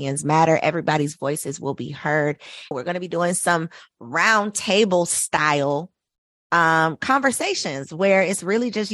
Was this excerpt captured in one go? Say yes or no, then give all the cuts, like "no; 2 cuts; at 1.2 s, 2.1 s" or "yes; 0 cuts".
no; 1 cut; at 2.7 s